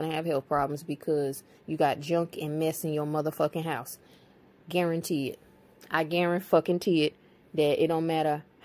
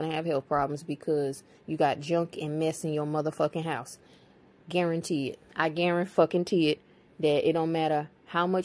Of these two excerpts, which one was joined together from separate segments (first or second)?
second